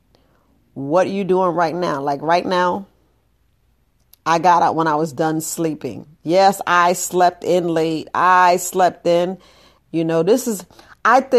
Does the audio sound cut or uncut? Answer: cut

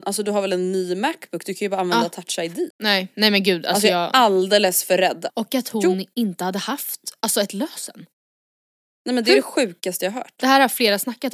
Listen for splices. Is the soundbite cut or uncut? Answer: cut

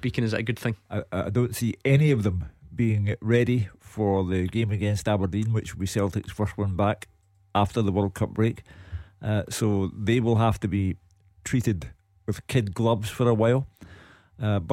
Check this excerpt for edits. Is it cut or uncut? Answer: uncut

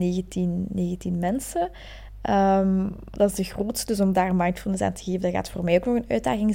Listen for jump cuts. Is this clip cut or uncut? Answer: uncut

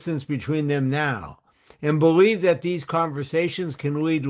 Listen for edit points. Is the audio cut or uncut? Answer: uncut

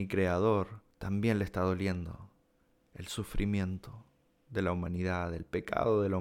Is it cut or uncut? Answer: cut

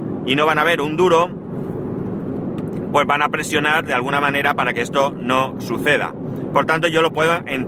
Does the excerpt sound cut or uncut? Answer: uncut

